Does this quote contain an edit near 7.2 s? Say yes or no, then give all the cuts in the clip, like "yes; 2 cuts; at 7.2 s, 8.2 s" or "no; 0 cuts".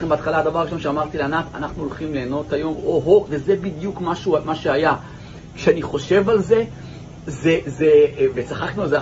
no; 1 cut; at 3.3 s